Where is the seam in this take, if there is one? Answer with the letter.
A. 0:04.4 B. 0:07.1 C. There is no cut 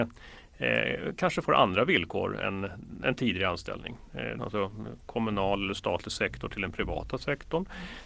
A